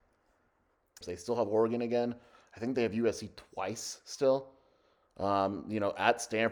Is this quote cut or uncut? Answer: cut